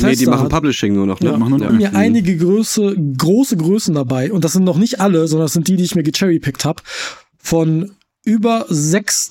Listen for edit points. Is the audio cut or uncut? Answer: cut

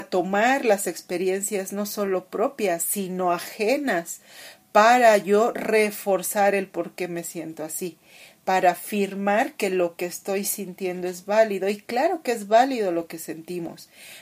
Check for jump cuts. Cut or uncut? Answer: uncut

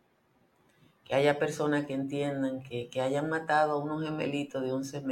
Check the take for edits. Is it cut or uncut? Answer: uncut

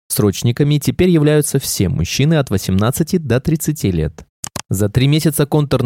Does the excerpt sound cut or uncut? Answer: uncut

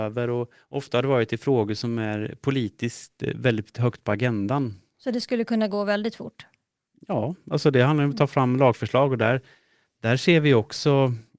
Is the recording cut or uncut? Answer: cut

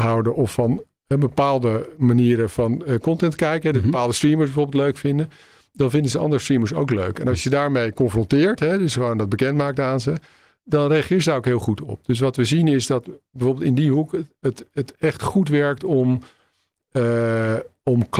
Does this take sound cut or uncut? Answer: uncut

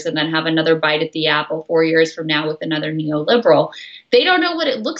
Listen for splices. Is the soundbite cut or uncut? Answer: uncut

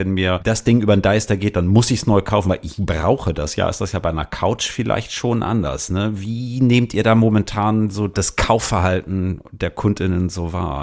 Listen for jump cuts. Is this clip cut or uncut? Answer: uncut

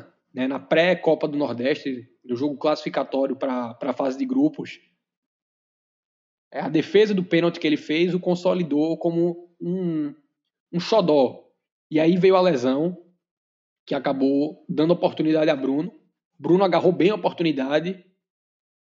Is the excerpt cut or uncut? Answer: uncut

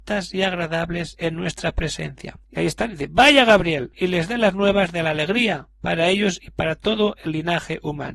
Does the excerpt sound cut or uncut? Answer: cut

